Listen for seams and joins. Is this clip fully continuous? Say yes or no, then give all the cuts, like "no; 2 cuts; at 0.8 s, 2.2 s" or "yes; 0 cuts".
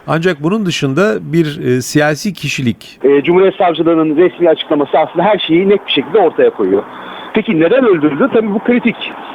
no; 2 cuts; at 3.0 s, 7.3 s